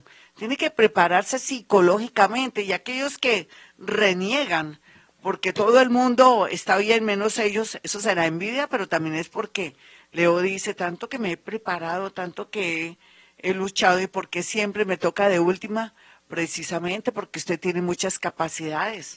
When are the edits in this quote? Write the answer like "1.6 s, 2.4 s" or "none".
none